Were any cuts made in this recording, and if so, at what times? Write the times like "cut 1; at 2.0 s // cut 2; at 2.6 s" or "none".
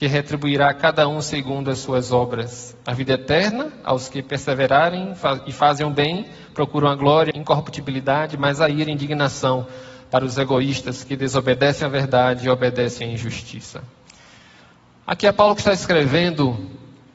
cut 1; at 7.3 s